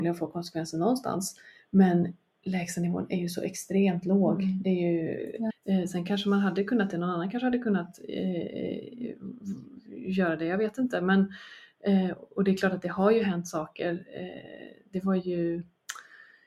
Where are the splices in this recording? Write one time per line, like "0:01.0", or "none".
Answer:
0:05.5